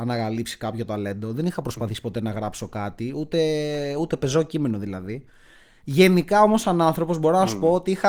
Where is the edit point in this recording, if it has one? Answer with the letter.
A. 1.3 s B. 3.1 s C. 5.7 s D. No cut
D